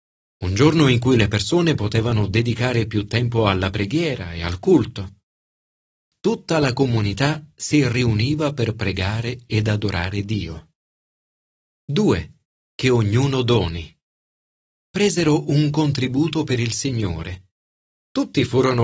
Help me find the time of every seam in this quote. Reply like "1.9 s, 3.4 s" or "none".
none